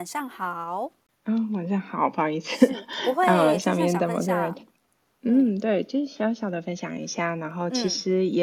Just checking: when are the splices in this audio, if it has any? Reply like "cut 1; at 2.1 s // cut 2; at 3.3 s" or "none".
none